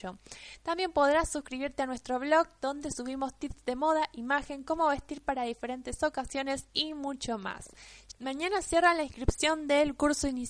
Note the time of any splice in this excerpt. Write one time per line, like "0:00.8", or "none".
0:08.1